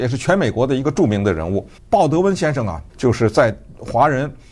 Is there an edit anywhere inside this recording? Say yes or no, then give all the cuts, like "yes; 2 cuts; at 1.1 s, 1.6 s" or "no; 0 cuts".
yes; 2 cuts; at 1.8 s, 2.9 s